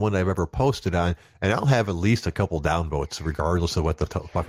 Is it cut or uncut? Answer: uncut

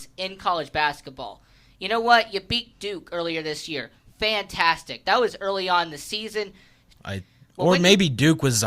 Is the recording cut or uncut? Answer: cut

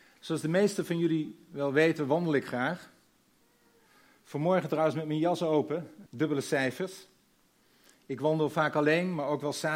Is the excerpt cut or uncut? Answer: cut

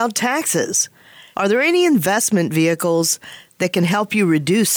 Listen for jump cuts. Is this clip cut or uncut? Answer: cut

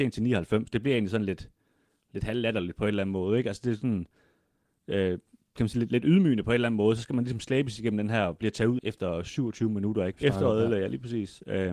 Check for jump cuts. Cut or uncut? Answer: cut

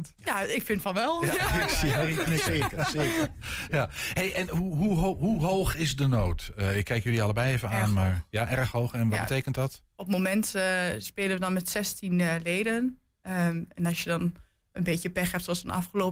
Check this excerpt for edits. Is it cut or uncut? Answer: uncut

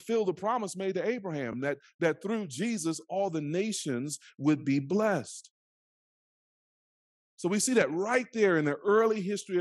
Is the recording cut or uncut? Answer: uncut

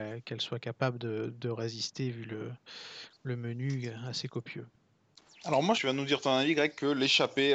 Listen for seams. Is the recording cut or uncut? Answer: cut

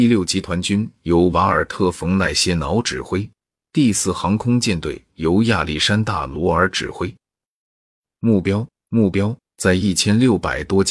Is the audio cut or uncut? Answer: cut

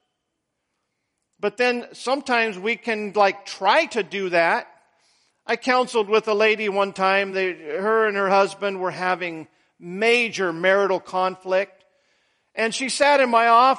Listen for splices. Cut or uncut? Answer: uncut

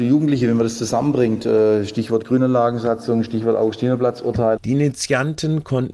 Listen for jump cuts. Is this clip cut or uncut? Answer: cut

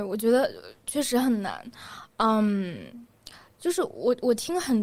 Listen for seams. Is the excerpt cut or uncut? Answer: uncut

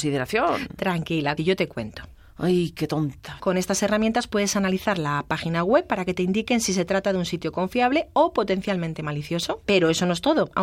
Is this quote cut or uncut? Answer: cut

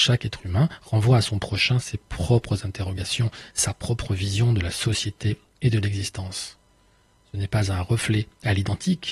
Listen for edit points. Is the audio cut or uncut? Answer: uncut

